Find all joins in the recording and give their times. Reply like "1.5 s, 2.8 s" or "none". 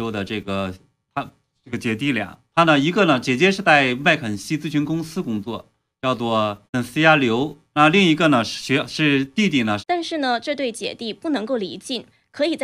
6.7 s, 9.8 s